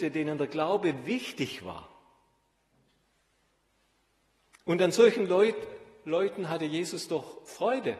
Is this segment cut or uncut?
uncut